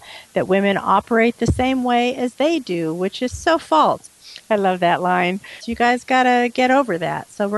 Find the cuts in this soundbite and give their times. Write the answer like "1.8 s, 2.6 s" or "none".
4.1 s, 5.6 s